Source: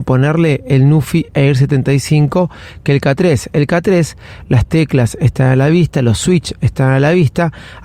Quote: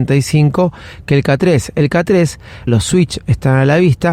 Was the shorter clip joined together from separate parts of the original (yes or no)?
yes